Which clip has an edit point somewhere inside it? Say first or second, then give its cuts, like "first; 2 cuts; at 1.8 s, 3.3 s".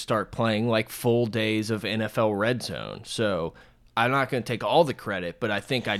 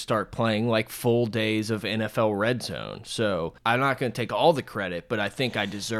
second; 1 cut; at 3.6 s